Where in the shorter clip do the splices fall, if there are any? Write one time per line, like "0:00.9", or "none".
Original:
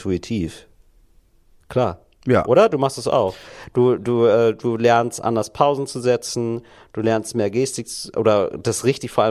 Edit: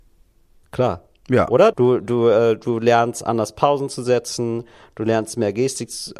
0:01.7